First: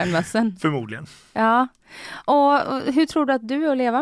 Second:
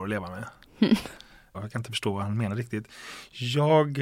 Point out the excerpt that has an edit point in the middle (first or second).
second